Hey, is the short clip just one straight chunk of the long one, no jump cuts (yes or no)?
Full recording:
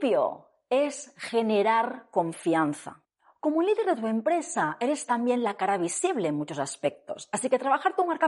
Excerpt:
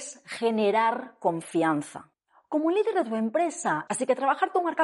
no